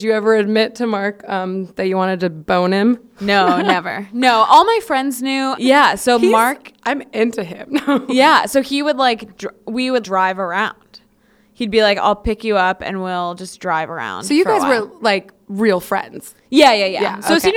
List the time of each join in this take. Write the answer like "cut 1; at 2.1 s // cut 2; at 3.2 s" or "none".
cut 1; at 5.6 s // cut 2; at 10.0 s